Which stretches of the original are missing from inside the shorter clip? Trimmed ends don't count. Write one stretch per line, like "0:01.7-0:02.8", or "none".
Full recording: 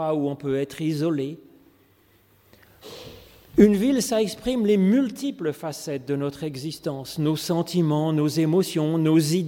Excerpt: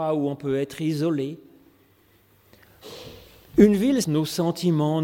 0:04.0-0:07.1